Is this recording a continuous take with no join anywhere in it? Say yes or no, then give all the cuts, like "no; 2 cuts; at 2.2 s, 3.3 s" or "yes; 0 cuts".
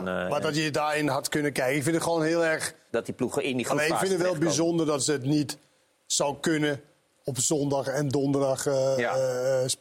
no; 1 cut; at 2.9 s